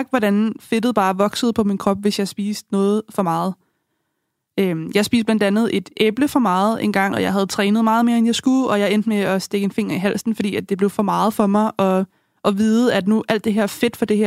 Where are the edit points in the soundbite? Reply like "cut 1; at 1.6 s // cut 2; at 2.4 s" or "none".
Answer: cut 1; at 7.1 s